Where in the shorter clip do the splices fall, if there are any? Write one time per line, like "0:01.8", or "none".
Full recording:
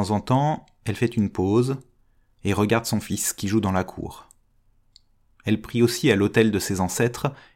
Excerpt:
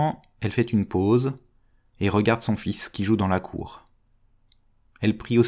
none